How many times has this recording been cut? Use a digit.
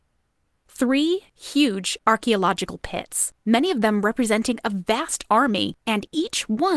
1